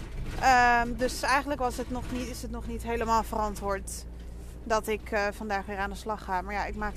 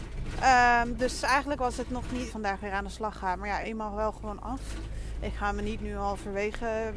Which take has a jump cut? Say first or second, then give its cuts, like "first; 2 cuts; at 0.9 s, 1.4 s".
second; 2 cuts; at 2.3 s, 3.6 s